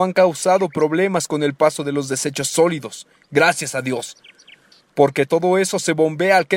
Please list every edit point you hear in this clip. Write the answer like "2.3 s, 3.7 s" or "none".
none